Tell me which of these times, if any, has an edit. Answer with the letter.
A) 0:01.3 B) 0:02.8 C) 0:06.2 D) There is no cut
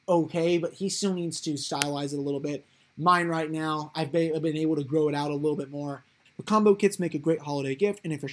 C